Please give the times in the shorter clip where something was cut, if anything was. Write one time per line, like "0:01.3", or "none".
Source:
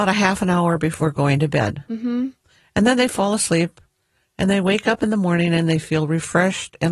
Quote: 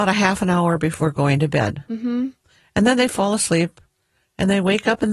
none

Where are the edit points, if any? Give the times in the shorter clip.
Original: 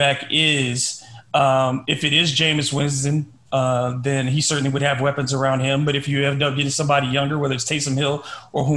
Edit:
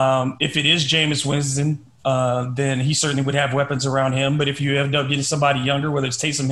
none

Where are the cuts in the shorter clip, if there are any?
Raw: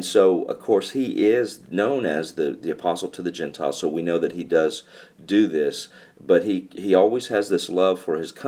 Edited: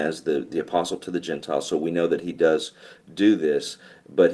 none

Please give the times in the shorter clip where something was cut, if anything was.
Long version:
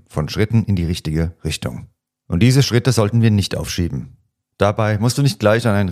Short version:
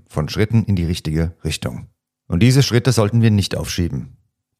none

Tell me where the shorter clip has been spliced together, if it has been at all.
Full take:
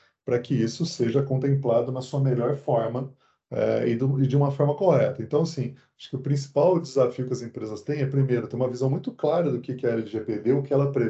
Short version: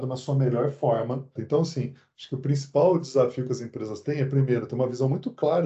0:01.4

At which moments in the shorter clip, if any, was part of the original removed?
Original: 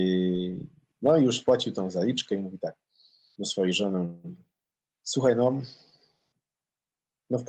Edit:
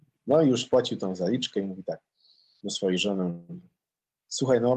none

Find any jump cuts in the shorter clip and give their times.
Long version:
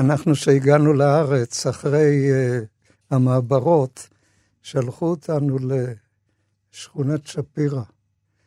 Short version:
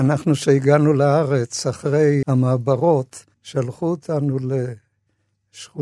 0:02.2
0:03.3

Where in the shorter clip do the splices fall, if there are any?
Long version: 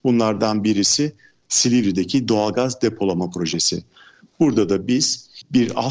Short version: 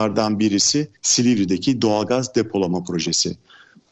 0:01.0

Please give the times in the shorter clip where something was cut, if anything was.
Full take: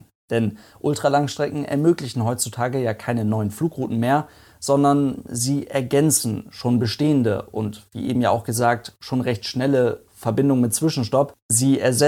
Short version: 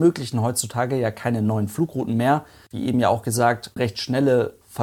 0:02.7
0:03.8

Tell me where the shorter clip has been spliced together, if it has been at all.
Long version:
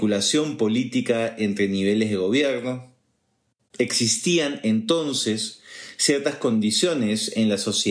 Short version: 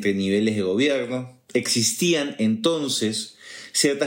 0:01.5

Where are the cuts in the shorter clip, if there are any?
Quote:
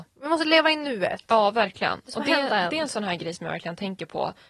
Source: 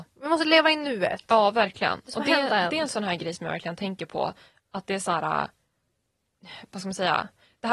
none

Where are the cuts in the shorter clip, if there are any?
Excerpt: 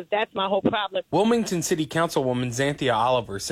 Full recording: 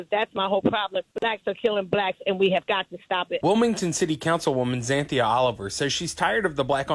0:01.1

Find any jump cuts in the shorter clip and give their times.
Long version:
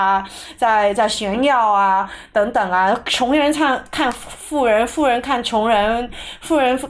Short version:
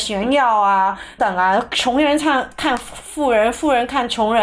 0:01.2

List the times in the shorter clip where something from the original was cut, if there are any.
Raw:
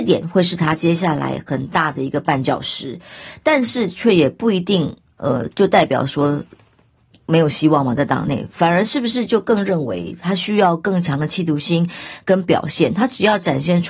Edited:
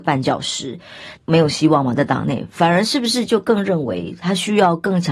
0:01.1

